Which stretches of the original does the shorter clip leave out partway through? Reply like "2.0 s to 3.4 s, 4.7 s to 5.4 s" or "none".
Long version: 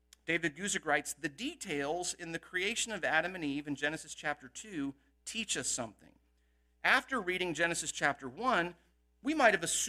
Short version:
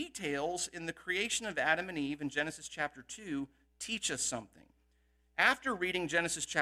none

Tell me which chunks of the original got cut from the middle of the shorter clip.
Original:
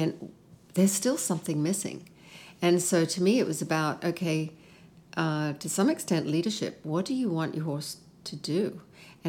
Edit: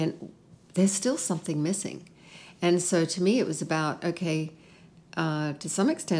none

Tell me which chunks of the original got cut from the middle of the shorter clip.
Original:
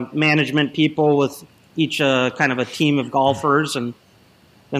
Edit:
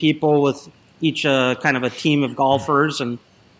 none

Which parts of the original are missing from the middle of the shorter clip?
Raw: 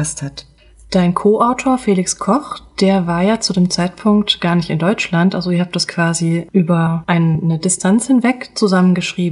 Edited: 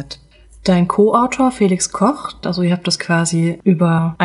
2.7 s to 5.3 s

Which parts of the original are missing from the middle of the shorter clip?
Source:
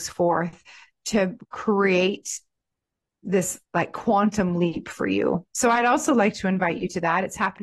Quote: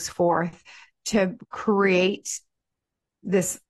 none

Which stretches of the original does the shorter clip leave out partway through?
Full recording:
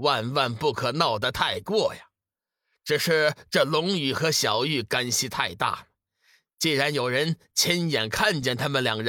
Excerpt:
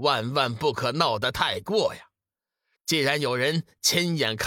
2.7 s to 6.5 s

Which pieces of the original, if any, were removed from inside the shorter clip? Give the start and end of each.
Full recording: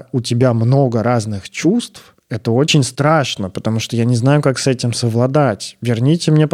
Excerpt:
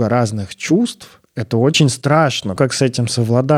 3.5 s to 4.4 s

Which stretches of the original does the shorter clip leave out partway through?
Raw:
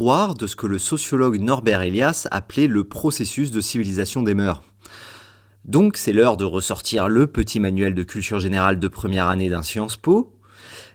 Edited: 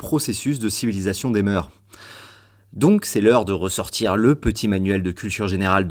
none

